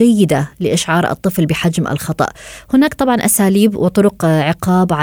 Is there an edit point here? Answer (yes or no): no